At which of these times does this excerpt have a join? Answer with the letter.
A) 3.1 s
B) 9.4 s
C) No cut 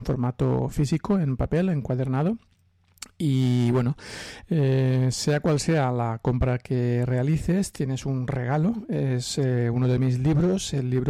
C